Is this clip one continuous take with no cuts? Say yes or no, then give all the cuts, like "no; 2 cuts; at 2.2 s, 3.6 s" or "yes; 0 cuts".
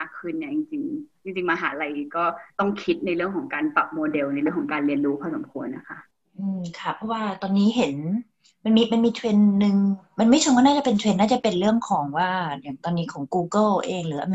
no; 1 cut; at 2.5 s